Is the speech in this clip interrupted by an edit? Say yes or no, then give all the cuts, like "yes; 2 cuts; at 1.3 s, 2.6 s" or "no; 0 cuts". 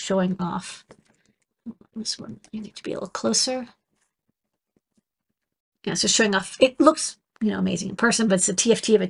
no; 0 cuts